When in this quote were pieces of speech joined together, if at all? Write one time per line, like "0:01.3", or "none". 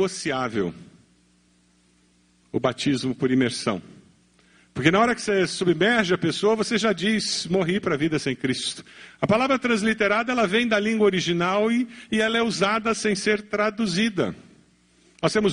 0:09.2